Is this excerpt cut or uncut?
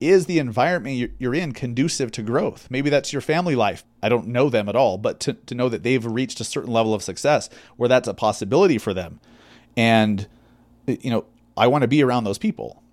cut